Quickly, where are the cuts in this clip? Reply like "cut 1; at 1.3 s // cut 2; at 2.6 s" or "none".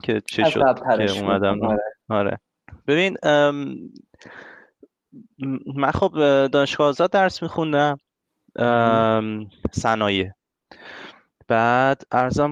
cut 1; at 2.0 s